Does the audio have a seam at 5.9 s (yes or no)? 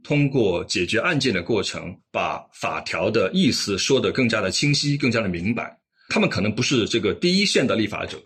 no